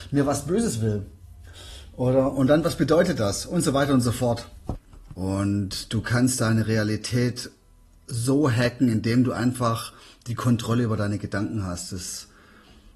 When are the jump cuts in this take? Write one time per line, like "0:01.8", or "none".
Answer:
0:05.1